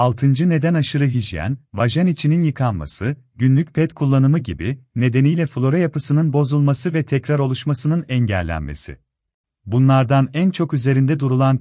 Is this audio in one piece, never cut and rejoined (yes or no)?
no